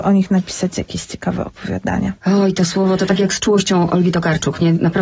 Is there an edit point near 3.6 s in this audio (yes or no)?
no